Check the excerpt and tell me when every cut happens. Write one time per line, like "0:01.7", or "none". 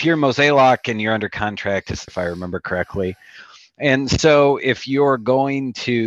0:02.1